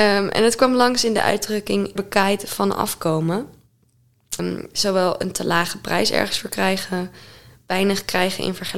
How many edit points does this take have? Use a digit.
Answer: 2